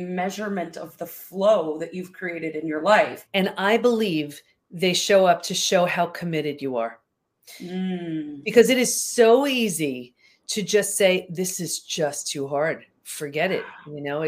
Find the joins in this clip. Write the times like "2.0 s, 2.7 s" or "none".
3.3 s